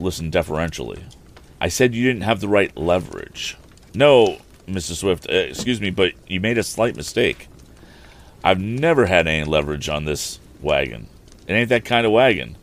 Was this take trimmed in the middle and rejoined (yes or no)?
no